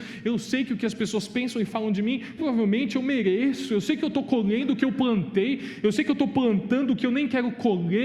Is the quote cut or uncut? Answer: cut